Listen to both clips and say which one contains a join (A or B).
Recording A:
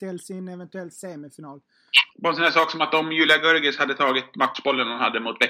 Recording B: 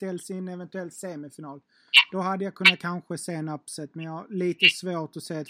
A